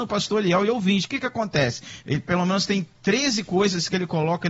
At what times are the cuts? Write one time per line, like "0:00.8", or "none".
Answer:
0:02.0